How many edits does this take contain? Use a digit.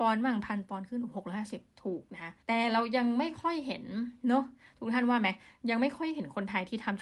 2